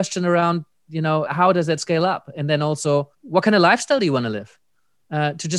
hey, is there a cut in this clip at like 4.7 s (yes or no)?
no